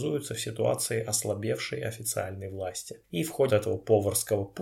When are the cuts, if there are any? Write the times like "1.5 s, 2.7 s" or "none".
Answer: 3.5 s